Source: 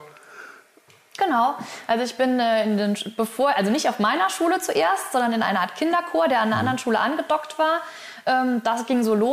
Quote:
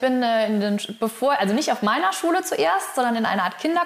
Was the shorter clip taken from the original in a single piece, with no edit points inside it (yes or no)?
yes